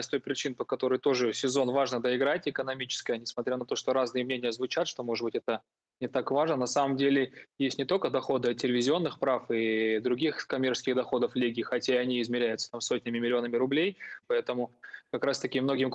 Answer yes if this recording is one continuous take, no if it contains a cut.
no